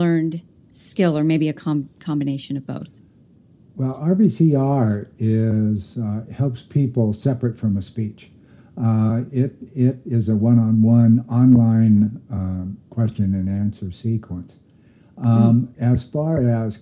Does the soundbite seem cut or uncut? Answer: uncut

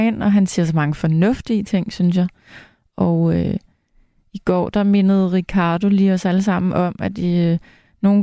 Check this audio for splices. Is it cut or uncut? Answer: uncut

